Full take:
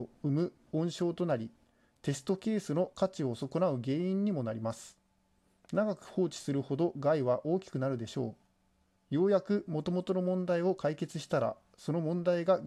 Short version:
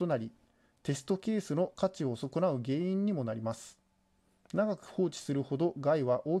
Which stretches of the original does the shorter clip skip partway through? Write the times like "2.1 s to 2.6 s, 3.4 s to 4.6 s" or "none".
none